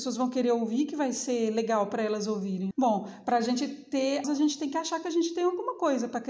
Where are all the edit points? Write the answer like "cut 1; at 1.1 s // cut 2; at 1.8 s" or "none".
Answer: cut 1; at 2.7 s // cut 2; at 4.2 s